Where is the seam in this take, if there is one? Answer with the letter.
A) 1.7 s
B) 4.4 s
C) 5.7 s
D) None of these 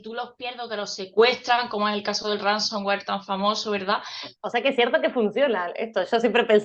B